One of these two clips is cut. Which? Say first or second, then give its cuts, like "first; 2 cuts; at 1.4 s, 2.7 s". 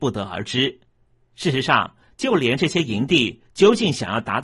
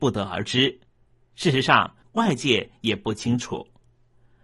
second; 1 cut; at 2.0 s